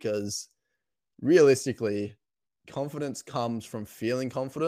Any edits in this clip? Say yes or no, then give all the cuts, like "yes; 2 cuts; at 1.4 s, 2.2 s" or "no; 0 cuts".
no; 0 cuts